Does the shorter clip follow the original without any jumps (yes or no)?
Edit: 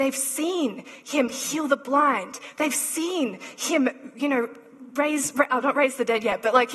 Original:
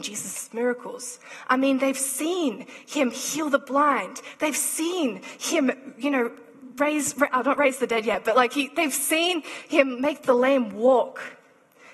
yes